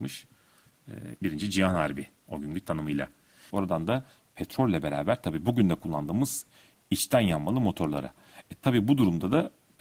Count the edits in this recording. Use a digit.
2